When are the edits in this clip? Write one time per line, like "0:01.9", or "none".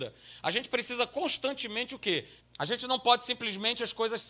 0:02.4